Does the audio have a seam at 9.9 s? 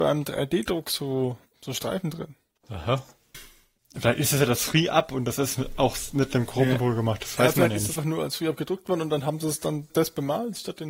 yes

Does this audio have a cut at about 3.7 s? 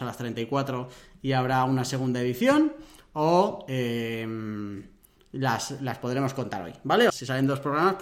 no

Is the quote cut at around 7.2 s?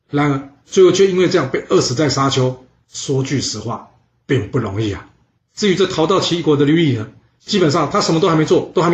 no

